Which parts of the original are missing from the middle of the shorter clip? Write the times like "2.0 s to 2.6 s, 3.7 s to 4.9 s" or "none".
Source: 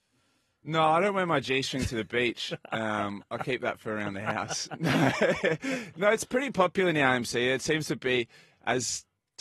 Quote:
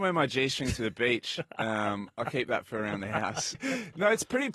4.7 s to 5.6 s